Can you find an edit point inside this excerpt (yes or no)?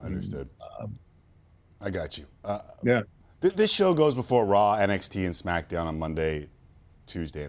no